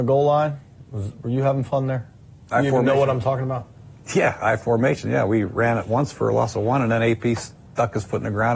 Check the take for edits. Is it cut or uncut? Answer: uncut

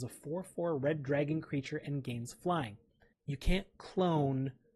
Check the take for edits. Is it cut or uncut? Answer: cut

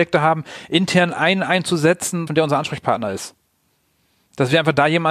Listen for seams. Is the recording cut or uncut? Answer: cut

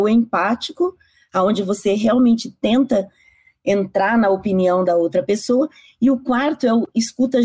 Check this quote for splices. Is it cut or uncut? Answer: uncut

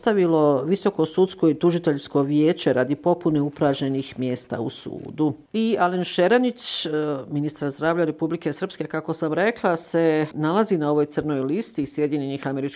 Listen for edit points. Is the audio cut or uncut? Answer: uncut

